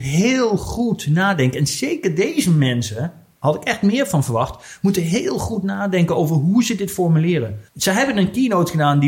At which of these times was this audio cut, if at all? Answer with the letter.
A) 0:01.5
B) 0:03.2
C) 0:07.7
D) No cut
C